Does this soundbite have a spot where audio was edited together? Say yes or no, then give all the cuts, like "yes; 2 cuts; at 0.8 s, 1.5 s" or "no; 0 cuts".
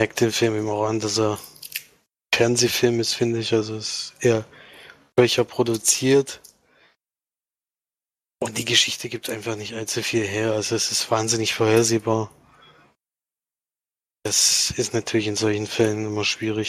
no; 0 cuts